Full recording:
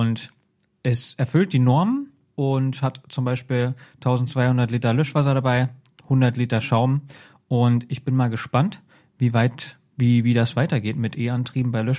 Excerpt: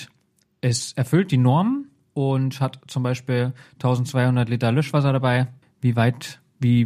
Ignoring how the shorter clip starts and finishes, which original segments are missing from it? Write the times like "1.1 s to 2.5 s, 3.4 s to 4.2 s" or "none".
5.8 s to 9.0 s